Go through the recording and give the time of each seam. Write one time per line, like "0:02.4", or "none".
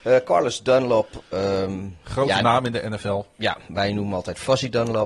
none